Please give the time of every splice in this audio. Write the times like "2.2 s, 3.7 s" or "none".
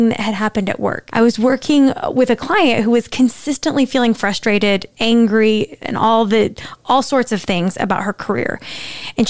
1.1 s, 4.9 s